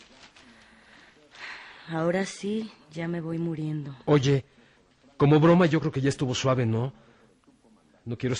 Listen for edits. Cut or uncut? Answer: uncut